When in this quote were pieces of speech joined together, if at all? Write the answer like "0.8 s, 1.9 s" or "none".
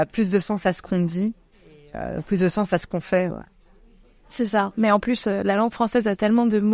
none